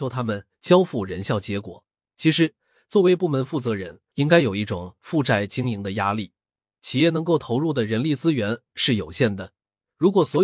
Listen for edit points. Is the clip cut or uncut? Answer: cut